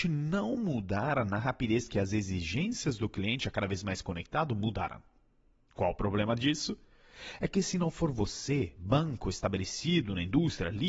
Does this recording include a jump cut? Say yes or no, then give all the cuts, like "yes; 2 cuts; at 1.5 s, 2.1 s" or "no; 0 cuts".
no; 0 cuts